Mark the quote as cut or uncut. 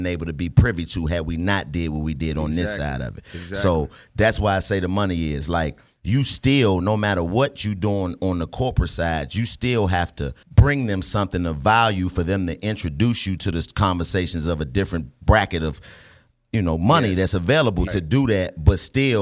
cut